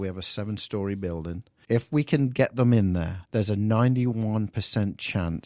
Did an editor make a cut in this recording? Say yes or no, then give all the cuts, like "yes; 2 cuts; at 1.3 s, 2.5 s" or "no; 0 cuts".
yes; 2 cuts; at 1.6 s, 3.3 s